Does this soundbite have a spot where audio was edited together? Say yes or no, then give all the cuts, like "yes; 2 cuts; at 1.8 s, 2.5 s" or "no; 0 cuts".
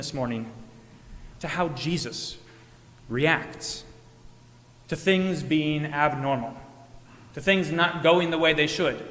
no; 0 cuts